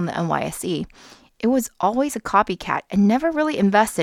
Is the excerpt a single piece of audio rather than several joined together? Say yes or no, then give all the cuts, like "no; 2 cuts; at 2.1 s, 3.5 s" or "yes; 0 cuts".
yes; 0 cuts